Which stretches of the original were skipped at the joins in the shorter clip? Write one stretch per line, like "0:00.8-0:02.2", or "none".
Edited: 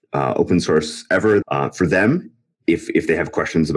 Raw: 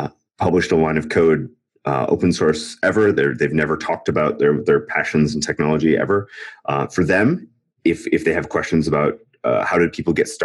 0:03.1-0:06.6